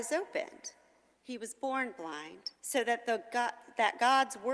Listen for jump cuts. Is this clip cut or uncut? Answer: cut